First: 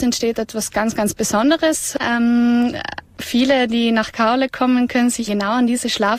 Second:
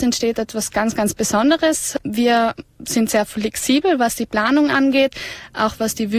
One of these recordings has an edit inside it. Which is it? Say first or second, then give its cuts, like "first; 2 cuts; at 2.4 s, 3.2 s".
first; 2 cuts; at 2.0 s, 5.3 s